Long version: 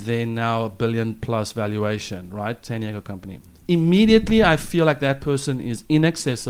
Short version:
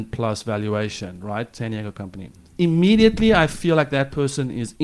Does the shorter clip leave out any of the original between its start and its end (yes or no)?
no